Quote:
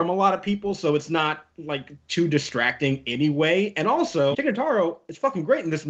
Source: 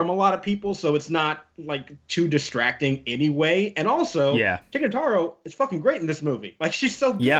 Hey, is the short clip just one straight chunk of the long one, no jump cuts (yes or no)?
no